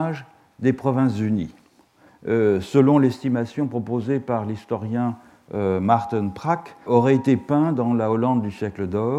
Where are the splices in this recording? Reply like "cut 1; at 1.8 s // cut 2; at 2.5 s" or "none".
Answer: cut 1; at 2.1 s // cut 2; at 6.9 s

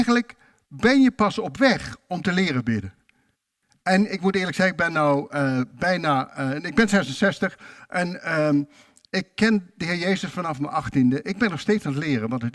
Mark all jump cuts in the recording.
none

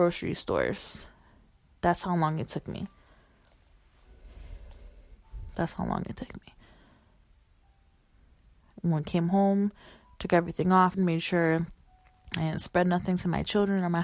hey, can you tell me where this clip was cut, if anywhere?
cut 1; at 10.9 s

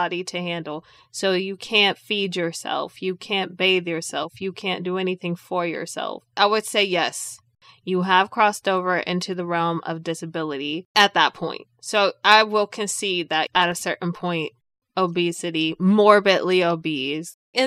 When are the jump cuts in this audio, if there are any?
none

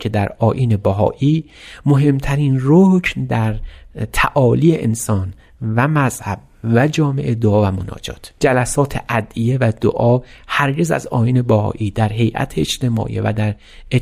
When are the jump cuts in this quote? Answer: cut 1; at 8.4 s

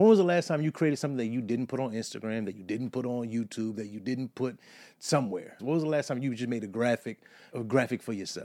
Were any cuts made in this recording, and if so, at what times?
cut 1; at 5.6 s // cut 2; at 7.5 s

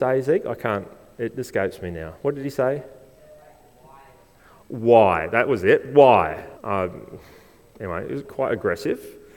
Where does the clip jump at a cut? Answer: cut 1; at 6.6 s // cut 2; at 8.2 s

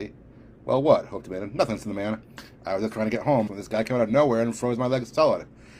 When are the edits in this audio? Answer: cut 1; at 3.5 s

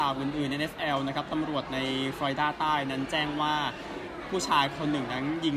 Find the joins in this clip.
none

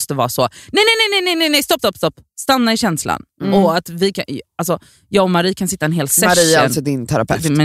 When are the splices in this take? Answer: cut 1; at 1.8 s

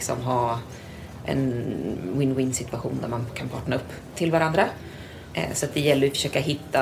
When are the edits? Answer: cut 1; at 4.1 s // cut 2; at 5.3 s

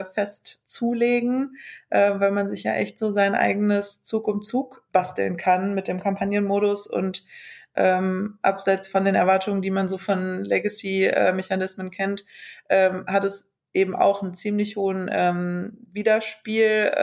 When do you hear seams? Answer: cut 1; at 4.9 s

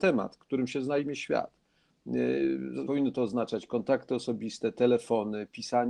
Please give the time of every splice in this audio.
cut 1; at 2.9 s

